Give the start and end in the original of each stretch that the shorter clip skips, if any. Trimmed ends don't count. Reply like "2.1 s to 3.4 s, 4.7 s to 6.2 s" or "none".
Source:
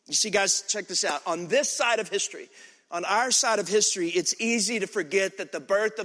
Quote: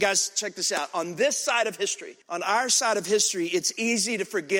2.5 s to 2.8 s